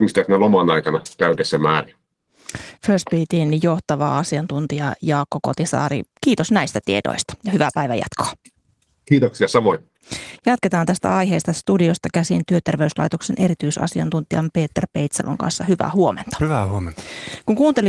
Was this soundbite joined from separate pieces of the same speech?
no; 0 cuts

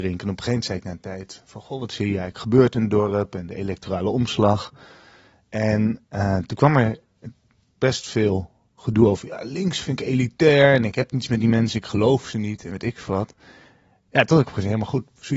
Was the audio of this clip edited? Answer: no; 0 cuts

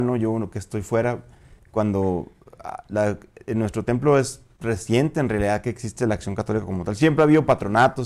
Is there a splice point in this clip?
no; 0 cuts

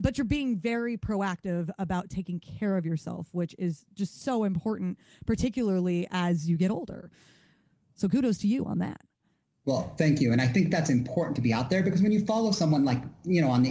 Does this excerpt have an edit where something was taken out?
no; 0 cuts

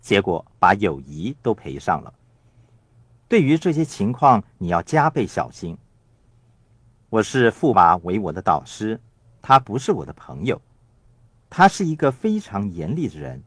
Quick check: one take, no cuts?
no; 1 cut; at 7.7 s

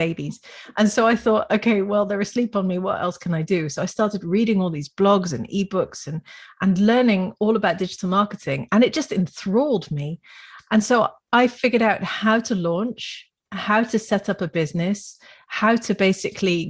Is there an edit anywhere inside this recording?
no; 0 cuts

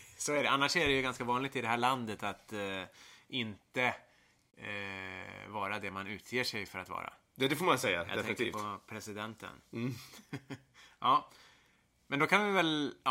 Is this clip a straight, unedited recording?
yes; 0 cuts

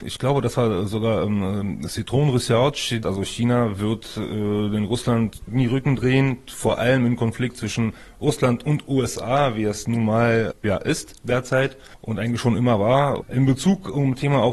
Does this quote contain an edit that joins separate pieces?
yes; 2 cuts; at 3.0 s, 13.2 s

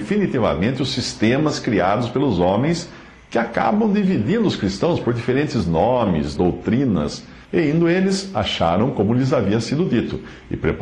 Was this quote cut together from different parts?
yes; 2 cuts; at 6.4 s, 7.4 s

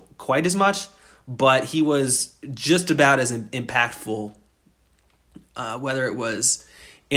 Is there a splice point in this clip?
no; 0 cuts

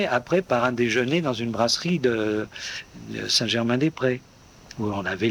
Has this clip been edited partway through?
no; 0 cuts

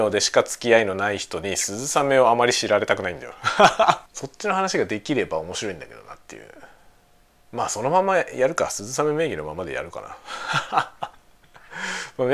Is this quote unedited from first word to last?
no; 1 cut; at 4.1 s

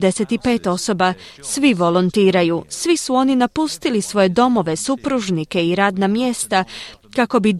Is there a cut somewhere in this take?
no; 0 cuts

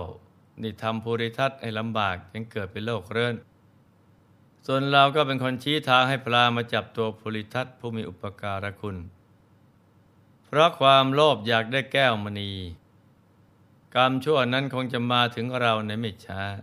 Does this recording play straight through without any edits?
yes; 0 cuts

